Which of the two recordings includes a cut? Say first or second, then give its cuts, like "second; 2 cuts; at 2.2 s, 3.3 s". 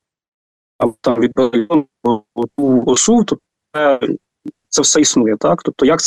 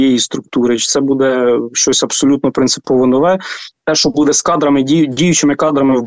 second; 1 cut; at 3.7 s